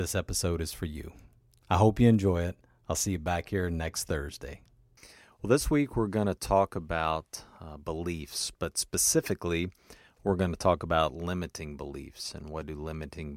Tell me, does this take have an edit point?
no; 0 cuts

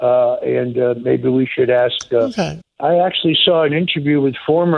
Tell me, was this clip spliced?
yes; 1 cut; at 2.6 s

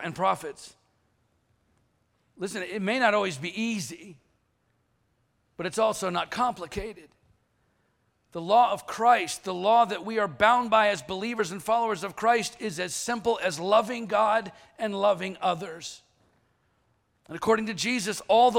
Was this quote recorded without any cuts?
yes; 0 cuts

